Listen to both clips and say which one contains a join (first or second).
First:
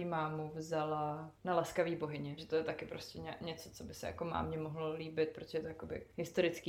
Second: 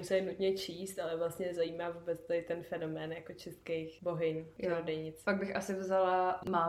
first